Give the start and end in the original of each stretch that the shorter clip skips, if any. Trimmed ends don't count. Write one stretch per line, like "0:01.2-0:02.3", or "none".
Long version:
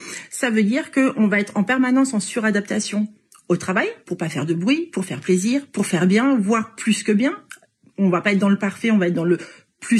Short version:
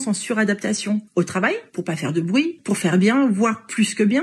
0:03.1-0:03.4
0:04.9-0:05.7